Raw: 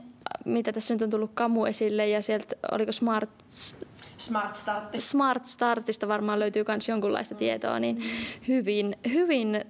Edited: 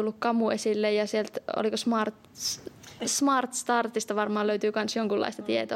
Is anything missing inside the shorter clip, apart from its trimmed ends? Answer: yes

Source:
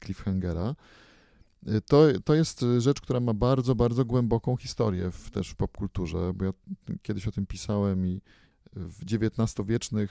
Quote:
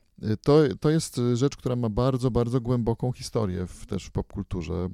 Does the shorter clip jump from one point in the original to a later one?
no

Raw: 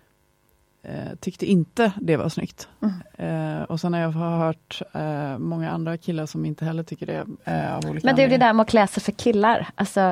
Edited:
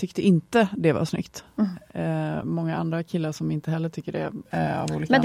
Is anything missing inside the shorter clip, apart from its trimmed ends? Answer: yes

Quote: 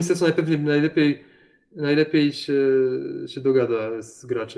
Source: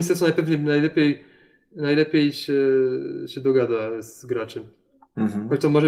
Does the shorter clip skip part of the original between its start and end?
no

